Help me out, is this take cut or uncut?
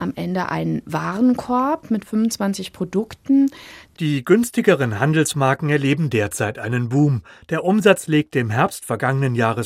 cut